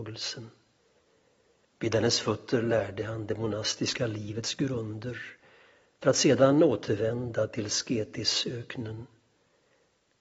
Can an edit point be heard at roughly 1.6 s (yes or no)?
yes